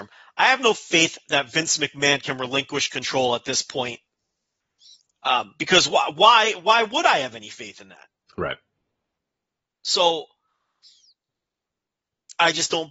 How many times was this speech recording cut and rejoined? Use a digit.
0